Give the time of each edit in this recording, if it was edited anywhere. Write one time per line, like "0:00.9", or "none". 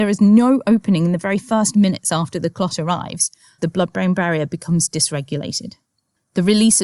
0:03.6